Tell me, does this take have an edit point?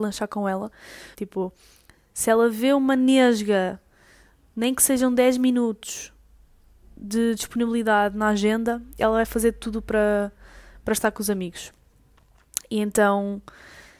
yes; 1 cut; at 1.1 s

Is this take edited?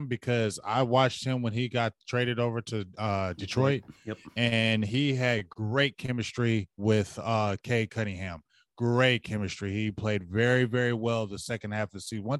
no; 0 cuts

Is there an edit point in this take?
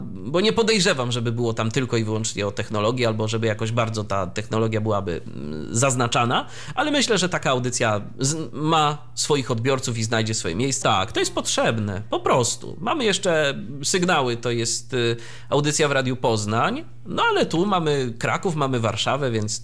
yes; 1 cut; at 10.8 s

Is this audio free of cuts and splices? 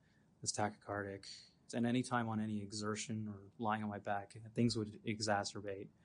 no; 1 cut; at 1.7 s

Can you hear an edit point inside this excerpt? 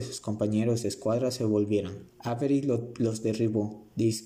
yes; 1 cut; at 2.1 s

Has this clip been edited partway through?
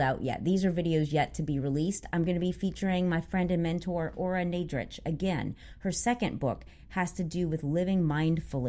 no; 0 cuts

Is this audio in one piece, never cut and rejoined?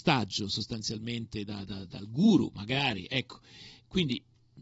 yes; 0 cuts

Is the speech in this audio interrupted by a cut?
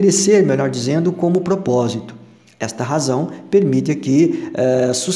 no; 0 cuts

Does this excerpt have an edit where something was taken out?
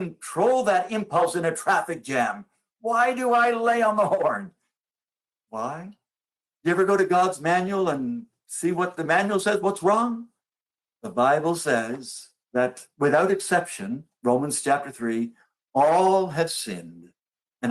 no; 0 cuts

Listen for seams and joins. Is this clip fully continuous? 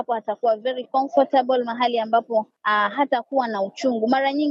yes; 0 cuts

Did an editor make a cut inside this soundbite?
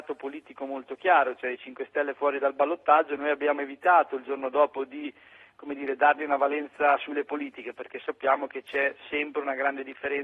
no; 0 cuts

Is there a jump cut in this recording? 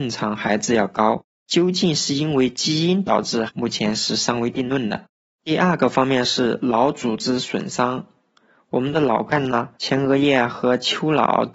yes; 2 cuts; at 3.5 s, 9.7 s

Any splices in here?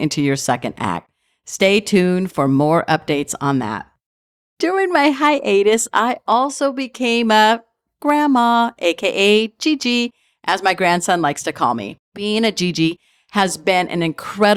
no; 0 cuts

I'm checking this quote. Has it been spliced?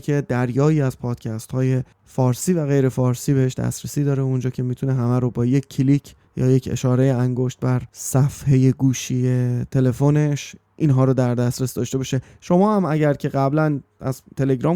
yes; 2 cuts; at 1.9 s, 6.2 s

